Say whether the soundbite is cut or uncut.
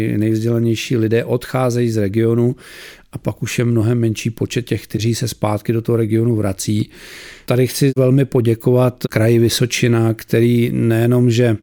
cut